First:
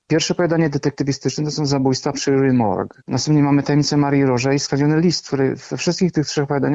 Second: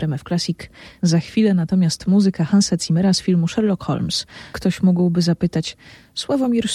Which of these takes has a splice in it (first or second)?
second